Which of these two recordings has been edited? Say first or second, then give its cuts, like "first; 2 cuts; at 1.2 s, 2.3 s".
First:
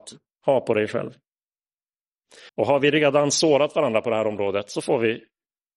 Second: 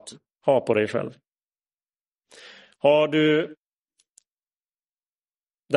first; 1 cut; at 2.5 s